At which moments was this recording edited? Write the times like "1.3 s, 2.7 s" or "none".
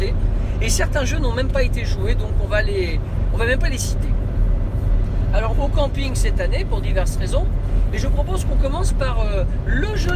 5.5 s